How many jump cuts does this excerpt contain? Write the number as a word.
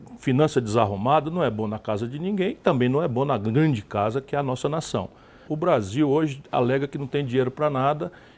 one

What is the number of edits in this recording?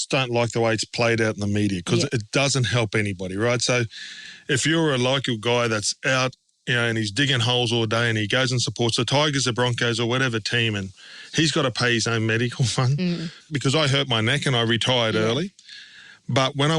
one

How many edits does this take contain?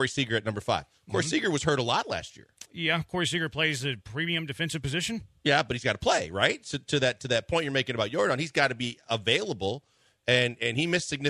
zero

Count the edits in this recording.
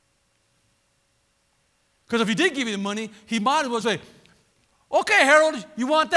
one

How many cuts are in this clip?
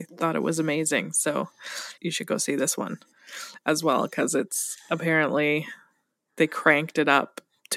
one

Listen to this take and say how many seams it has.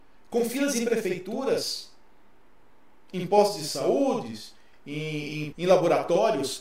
one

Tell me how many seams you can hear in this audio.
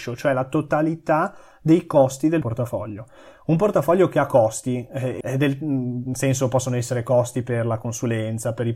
two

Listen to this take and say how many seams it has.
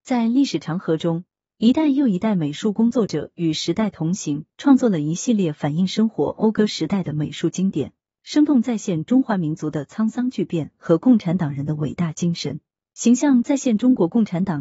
one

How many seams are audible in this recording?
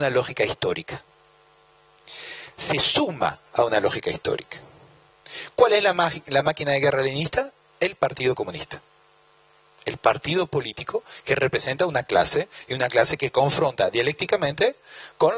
zero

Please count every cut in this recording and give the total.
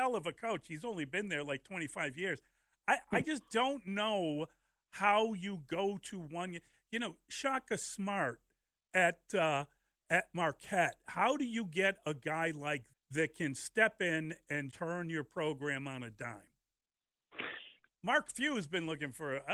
three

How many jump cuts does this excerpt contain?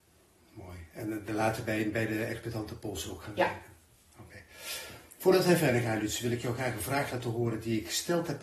zero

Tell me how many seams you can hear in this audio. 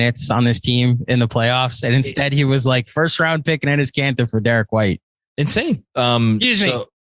one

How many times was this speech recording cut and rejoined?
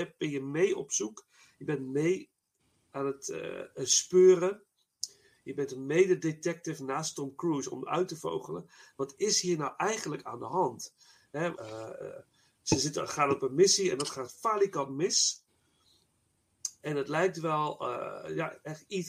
one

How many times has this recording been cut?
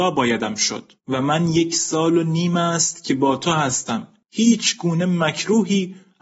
two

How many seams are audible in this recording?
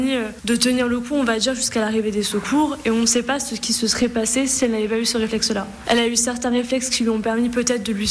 one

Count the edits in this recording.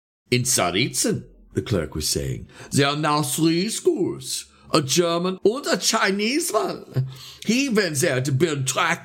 two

